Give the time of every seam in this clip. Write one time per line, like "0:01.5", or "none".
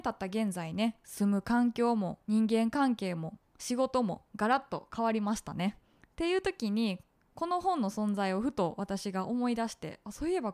0:02.2
0:05.8